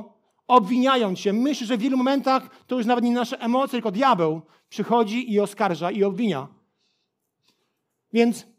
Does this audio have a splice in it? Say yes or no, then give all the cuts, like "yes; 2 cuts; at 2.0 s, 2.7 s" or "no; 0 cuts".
no; 0 cuts